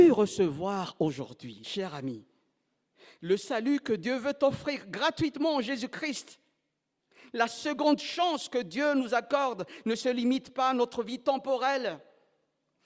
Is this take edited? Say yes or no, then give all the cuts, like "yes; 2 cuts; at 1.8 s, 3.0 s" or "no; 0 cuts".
no; 0 cuts